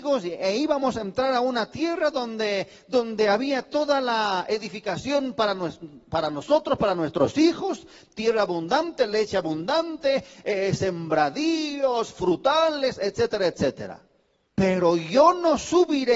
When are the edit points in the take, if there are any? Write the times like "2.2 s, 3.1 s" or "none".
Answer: 14.5 s